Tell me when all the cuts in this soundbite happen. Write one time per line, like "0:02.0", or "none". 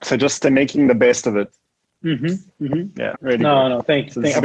0:03.1